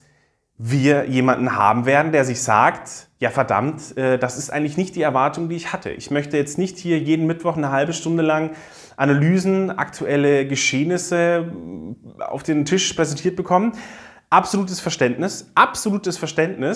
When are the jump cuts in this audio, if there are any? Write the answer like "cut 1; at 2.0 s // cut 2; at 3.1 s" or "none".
none